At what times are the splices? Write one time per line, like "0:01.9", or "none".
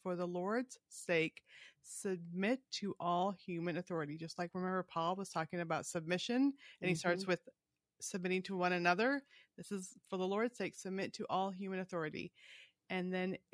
none